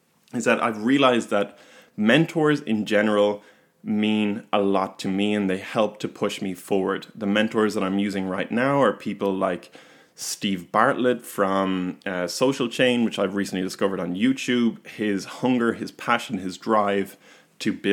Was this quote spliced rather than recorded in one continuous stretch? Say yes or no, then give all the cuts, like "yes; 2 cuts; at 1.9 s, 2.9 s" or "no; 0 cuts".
no; 0 cuts